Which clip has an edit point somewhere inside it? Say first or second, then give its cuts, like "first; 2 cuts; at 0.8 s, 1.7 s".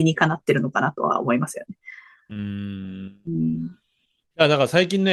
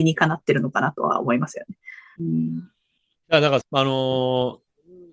second; 2 cuts; at 2.2 s, 3.6 s